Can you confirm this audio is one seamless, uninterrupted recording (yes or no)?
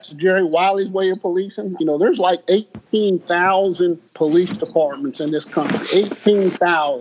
no